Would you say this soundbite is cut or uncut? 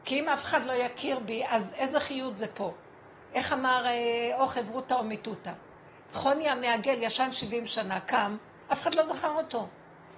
uncut